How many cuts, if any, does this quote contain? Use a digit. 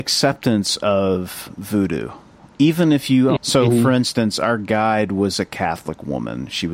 1